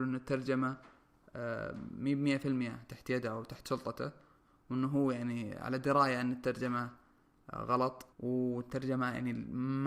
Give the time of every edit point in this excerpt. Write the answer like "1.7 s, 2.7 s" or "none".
8.1 s